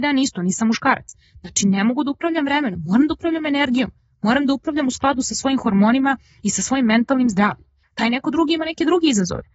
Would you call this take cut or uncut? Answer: cut